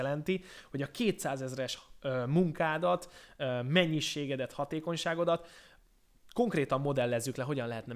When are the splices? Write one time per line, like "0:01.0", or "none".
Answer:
none

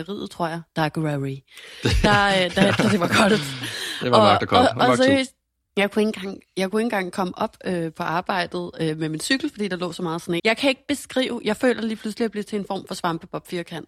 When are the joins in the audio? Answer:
0:02.8
0:10.4

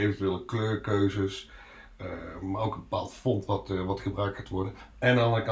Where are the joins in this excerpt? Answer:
none

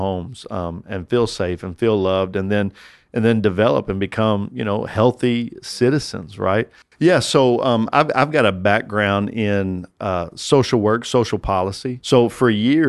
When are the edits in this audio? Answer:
0:06.8

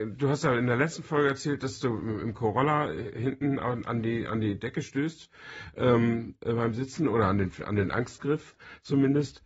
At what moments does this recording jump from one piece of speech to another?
none

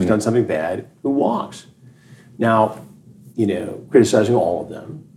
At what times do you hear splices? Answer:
0:03.3

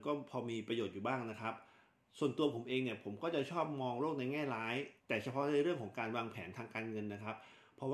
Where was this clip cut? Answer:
0:05.0

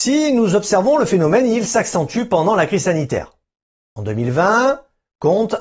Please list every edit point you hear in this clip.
none

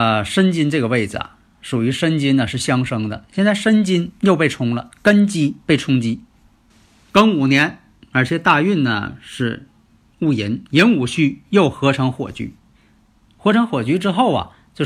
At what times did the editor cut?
none

